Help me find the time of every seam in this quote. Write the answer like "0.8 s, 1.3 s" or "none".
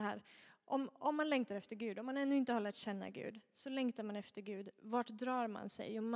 none

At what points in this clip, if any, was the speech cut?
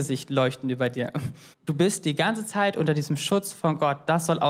1.5 s

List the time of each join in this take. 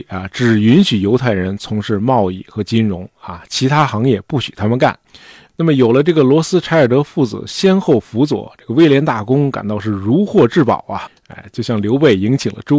5.5 s

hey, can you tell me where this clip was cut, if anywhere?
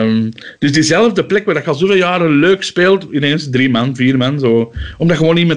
none

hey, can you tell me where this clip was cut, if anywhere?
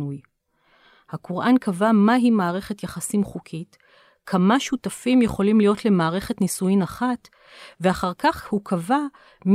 none

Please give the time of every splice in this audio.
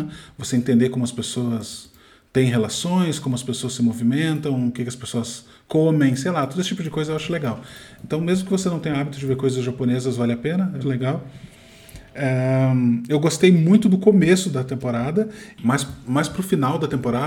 10.8 s

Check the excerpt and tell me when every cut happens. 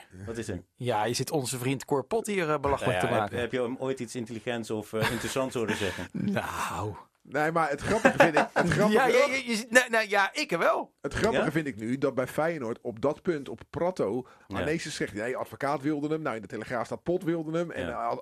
14.4 s

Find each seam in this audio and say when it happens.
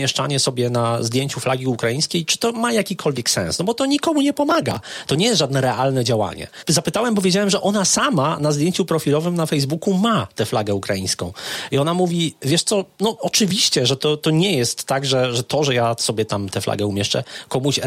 none

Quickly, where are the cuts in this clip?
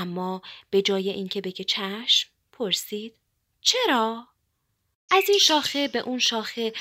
5.1 s

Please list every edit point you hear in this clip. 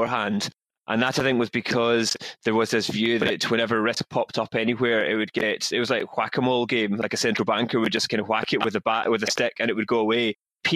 none

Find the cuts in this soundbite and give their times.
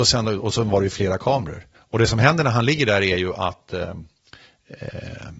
1.7 s

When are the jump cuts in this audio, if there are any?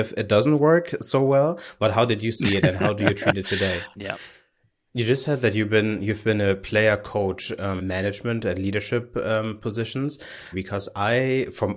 4.0 s, 7.8 s, 10.5 s

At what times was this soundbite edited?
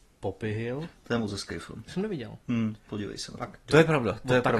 3.7 s

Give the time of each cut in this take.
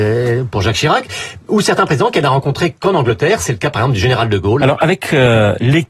4.6 s

